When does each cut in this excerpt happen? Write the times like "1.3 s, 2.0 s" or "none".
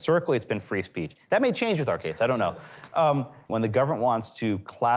3.5 s